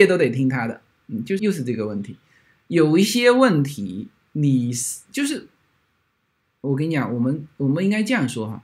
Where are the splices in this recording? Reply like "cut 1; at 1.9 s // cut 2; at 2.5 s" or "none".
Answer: cut 1; at 1.4 s